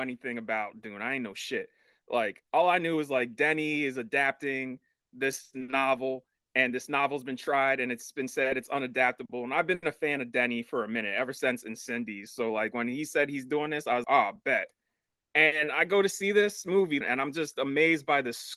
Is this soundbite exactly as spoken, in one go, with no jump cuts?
no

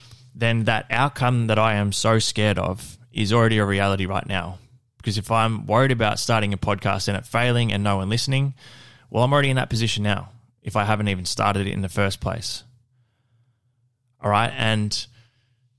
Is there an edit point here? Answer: no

